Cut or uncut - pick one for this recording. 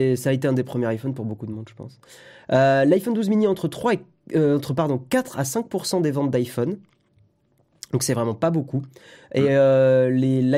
uncut